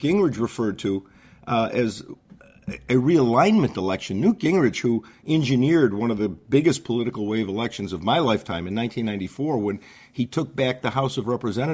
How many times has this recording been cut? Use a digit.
0